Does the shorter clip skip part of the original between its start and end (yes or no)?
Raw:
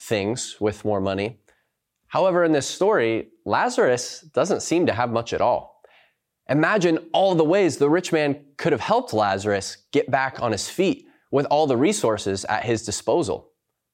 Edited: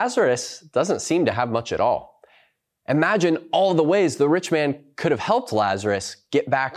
no